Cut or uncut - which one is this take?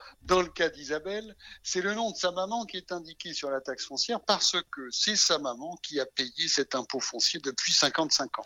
uncut